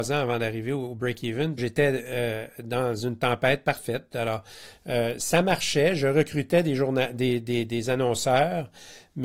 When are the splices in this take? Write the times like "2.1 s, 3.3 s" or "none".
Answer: 1.6 s